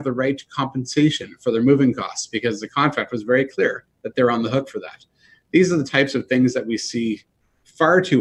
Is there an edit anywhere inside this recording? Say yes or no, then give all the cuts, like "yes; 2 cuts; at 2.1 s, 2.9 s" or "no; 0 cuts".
no; 0 cuts